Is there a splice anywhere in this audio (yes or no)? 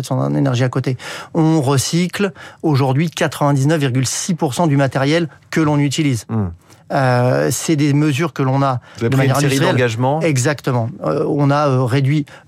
no